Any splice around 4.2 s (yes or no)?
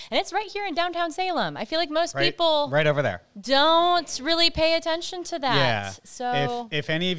no